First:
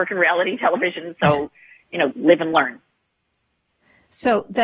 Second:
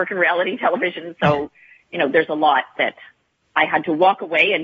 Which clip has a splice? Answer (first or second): first